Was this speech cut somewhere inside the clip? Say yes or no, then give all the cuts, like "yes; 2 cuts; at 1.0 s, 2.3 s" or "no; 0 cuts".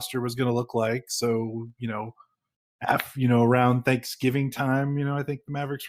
no; 0 cuts